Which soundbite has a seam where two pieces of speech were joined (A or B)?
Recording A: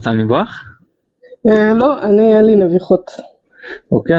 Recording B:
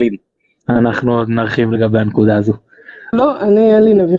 B